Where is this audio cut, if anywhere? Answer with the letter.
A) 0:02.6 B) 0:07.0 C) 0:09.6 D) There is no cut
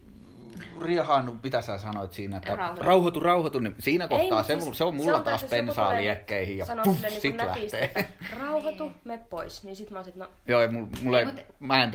D